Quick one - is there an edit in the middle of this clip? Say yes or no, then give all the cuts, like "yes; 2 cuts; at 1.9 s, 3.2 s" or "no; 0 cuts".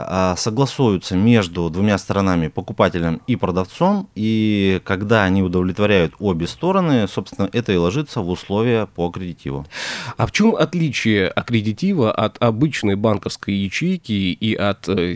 no; 0 cuts